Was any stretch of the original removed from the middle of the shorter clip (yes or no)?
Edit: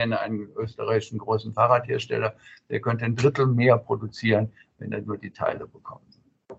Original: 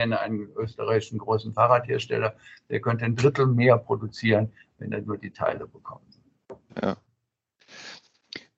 no